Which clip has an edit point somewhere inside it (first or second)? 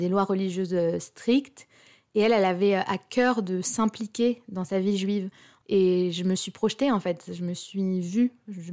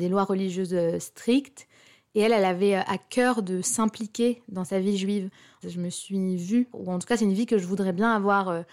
second